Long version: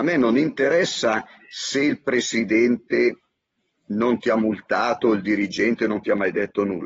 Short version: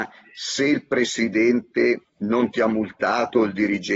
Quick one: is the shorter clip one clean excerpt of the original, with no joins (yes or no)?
no